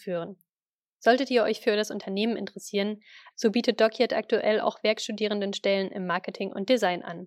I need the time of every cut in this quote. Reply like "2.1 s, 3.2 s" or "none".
3.3 s